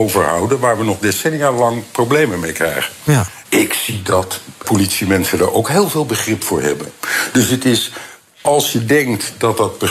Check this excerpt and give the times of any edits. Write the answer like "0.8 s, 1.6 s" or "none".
3.4 s, 4.6 s